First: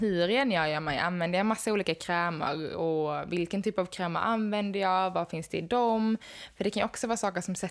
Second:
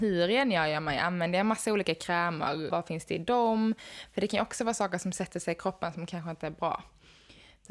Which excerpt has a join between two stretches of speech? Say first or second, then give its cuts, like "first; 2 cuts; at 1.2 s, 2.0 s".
second; 1 cut; at 2.7 s